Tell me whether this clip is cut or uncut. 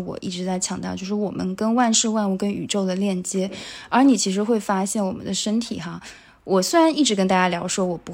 uncut